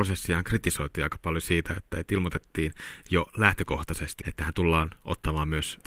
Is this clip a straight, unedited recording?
no; 1 cut; at 4.2 s

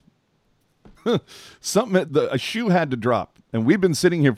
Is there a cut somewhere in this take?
yes; 2 cuts; at 1.0 s, 2.1 s

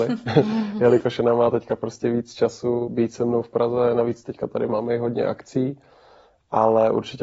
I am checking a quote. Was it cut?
yes; 1 cut; at 2.9 s

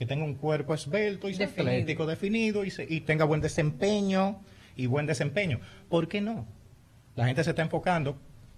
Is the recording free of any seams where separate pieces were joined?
yes; 0 cuts

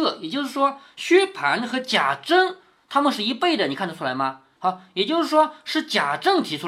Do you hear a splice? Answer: yes; 1 cut; at 4.6 s

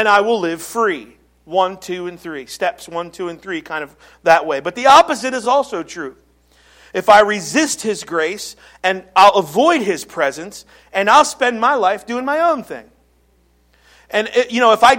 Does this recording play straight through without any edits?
yes; 0 cuts

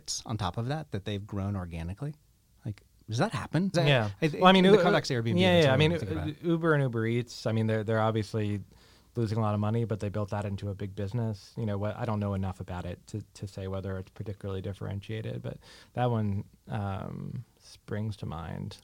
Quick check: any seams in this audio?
yes; 1 cut; at 3.7 s

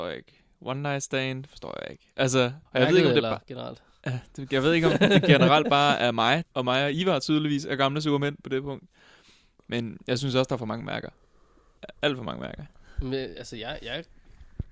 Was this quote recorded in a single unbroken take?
no; 2 cuts; at 2.7 s, 6.4 s

